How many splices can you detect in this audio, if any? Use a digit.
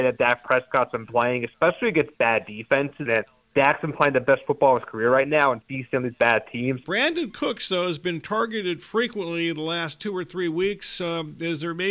2